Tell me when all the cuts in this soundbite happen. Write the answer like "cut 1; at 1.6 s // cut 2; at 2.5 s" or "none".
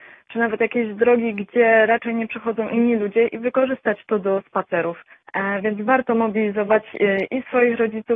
cut 1; at 5.3 s